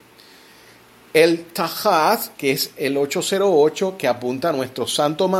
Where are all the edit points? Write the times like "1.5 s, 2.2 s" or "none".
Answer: none